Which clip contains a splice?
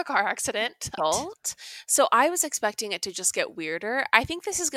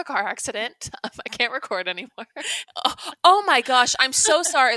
first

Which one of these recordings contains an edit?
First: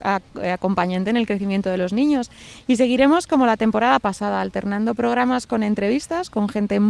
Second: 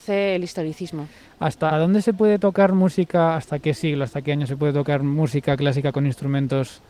second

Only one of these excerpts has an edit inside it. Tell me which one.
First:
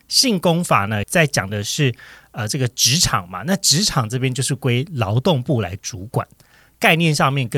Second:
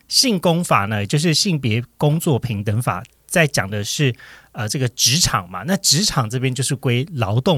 first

